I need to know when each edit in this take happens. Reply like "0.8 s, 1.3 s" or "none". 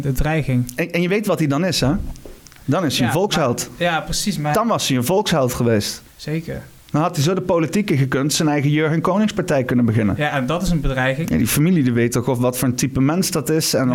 6.1 s, 11.2 s